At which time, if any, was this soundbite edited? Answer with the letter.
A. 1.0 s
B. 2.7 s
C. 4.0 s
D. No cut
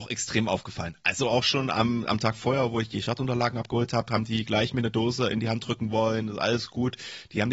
D